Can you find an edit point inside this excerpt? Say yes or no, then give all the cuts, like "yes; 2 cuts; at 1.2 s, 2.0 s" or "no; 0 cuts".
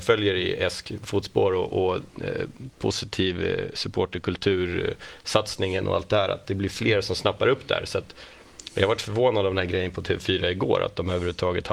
no; 0 cuts